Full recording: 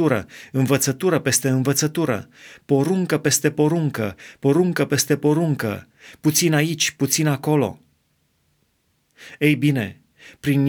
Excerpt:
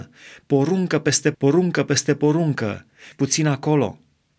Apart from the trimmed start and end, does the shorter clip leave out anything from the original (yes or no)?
yes